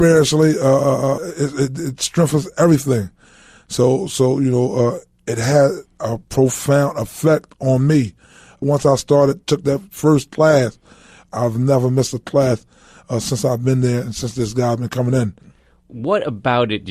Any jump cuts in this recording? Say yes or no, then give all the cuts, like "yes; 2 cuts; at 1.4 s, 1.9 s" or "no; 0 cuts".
no; 0 cuts